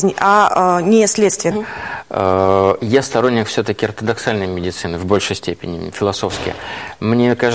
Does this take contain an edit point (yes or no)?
yes